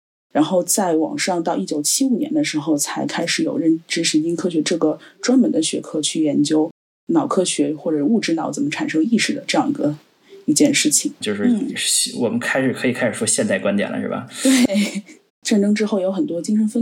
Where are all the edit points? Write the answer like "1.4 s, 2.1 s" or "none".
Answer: 11.2 s, 15.3 s